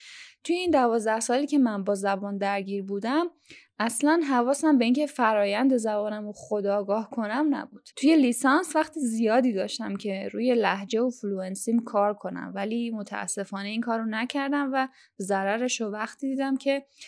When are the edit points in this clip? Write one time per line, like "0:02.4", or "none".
0:07.9